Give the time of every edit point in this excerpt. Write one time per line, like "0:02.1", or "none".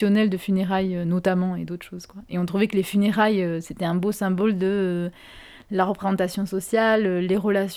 none